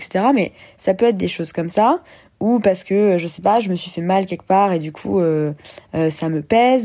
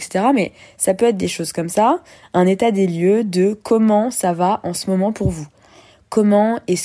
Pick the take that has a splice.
second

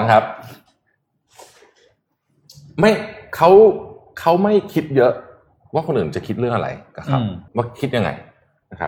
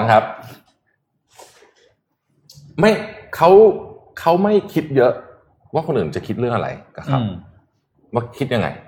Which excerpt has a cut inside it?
first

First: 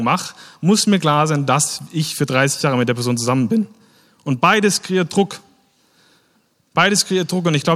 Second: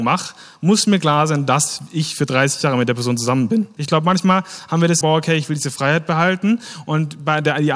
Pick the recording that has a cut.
second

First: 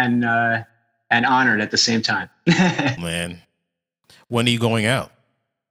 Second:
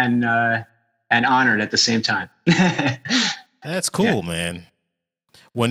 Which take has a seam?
first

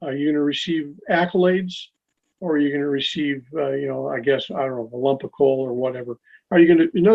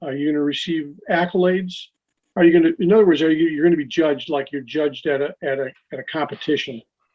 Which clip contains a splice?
second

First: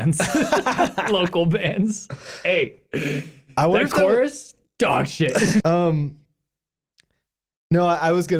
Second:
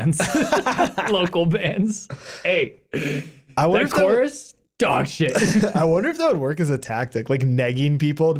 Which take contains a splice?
first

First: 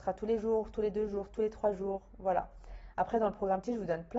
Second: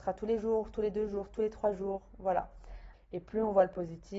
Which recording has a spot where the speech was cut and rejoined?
second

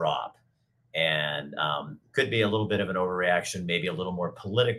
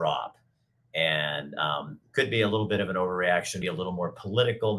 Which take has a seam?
second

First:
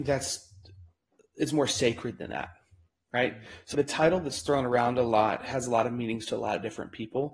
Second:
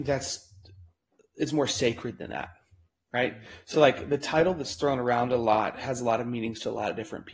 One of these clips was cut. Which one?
first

